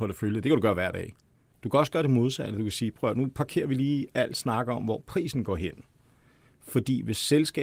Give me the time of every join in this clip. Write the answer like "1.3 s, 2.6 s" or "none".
1.5 s